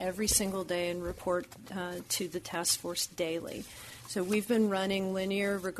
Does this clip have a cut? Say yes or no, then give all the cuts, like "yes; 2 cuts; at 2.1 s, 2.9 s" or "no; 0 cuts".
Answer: no; 0 cuts